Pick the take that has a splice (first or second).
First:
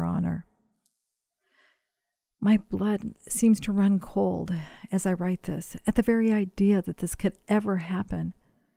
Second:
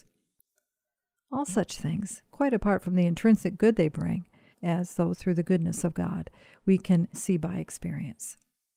second